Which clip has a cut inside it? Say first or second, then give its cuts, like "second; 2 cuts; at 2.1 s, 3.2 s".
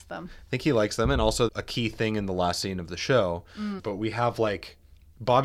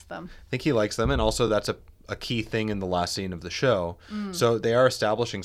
first; 2 cuts; at 1.5 s, 3.8 s